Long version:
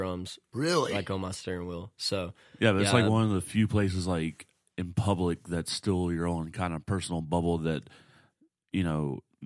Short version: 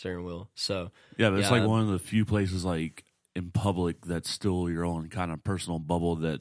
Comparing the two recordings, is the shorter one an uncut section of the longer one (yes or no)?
yes